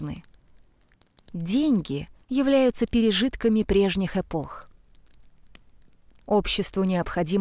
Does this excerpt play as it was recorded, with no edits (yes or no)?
no